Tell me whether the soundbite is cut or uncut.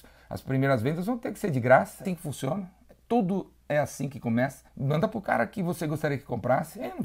cut